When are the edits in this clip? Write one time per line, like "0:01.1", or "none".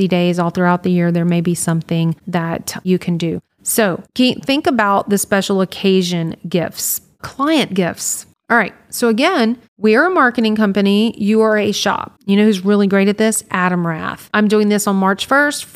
0:12.2
0:14.3